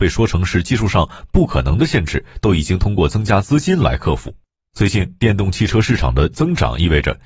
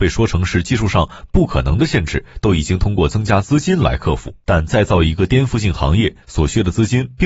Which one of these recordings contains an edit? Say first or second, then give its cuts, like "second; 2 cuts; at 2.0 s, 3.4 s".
second; 1 cut; at 4.5 s